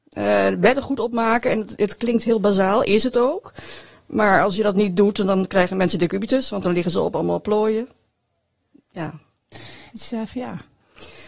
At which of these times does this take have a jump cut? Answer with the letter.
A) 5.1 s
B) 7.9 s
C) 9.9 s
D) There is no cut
C